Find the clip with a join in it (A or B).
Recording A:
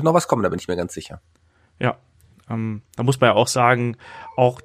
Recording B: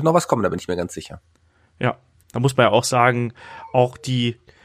B